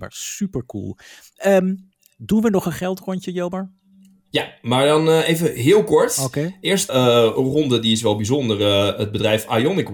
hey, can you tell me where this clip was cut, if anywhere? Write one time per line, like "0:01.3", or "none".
0:06.9